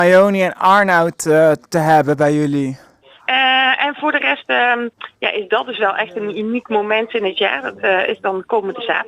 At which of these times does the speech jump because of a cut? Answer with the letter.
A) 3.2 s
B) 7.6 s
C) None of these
A